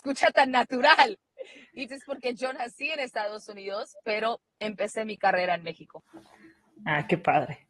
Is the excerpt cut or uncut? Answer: cut